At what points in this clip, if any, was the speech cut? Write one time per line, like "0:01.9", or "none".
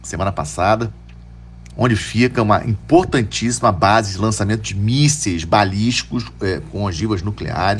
0:01.7